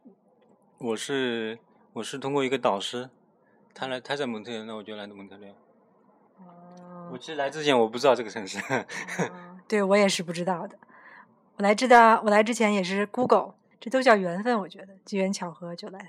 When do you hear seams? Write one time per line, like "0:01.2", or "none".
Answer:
0:13.7